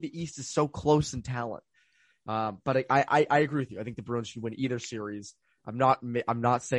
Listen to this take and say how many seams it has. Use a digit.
0